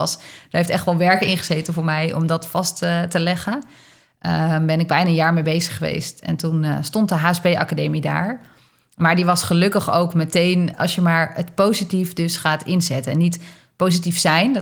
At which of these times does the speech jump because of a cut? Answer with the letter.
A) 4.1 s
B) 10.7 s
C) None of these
B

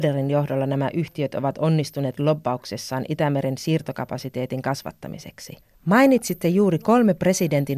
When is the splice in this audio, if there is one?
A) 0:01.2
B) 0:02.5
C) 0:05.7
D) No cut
C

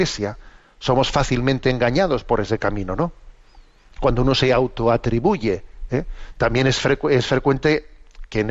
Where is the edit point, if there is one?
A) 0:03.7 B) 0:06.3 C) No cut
B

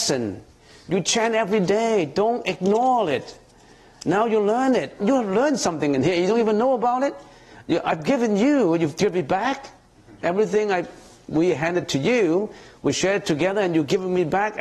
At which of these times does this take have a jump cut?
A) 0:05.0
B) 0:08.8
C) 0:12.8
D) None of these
A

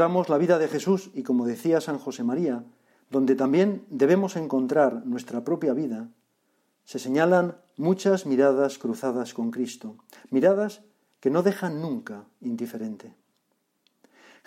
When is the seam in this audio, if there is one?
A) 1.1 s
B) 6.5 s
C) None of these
C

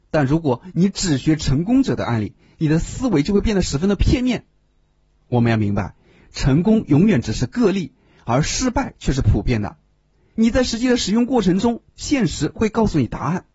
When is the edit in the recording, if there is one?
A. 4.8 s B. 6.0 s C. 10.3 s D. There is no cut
C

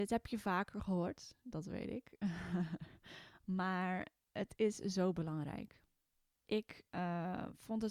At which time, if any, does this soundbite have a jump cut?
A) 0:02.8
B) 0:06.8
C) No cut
C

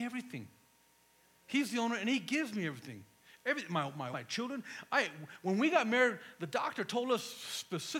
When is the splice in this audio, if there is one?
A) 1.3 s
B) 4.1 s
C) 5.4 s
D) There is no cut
B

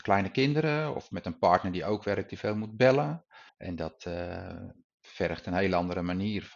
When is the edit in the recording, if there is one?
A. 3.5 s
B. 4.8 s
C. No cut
A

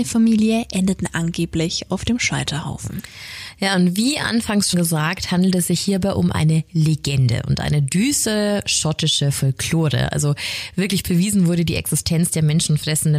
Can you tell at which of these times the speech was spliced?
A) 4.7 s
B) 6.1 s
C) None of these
A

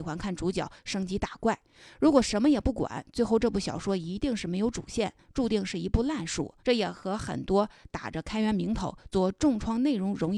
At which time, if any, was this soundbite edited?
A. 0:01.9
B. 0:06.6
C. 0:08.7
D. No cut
B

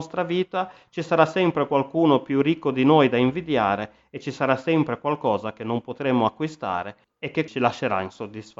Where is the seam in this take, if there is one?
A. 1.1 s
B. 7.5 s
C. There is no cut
B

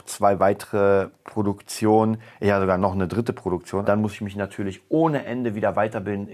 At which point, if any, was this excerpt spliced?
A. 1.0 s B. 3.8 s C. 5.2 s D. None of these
B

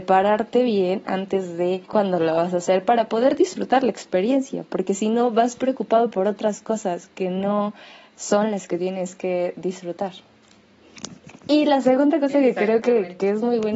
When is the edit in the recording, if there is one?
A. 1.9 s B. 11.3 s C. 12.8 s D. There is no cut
A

